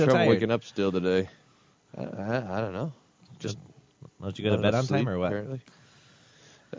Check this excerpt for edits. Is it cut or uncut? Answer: uncut